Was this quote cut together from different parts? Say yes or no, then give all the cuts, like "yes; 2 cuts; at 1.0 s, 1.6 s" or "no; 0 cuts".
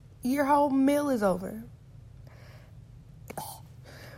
yes; 1 cut; at 3.3 s